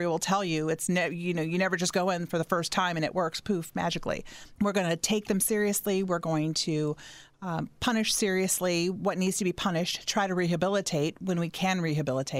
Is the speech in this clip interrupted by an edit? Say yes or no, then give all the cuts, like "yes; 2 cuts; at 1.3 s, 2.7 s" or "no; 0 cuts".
yes; 1 cut; at 4.6 s